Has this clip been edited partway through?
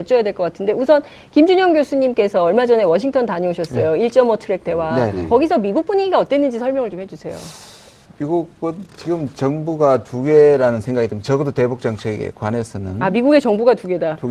yes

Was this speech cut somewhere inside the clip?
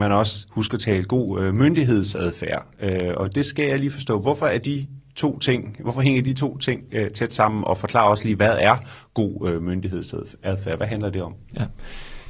no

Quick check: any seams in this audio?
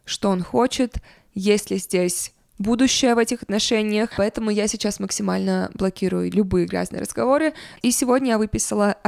yes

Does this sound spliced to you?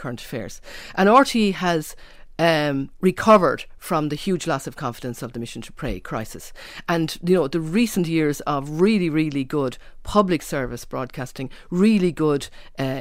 no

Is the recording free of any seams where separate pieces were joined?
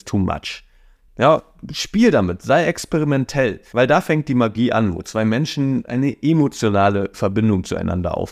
no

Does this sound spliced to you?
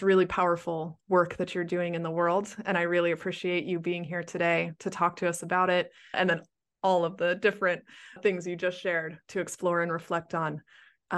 yes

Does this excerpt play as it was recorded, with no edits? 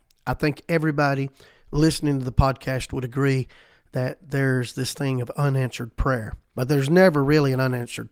no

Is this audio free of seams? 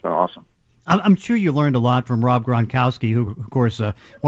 yes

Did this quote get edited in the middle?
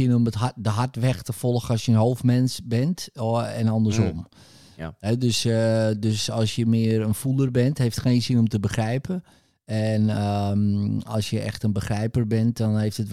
no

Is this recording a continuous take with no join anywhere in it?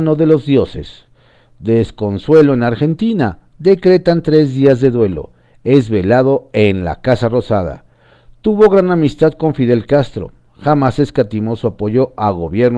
yes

